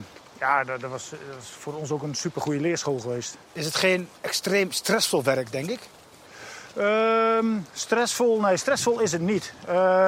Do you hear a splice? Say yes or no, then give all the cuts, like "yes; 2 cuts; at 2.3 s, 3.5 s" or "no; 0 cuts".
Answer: no; 0 cuts